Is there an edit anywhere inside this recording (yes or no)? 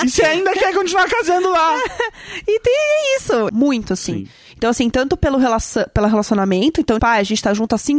yes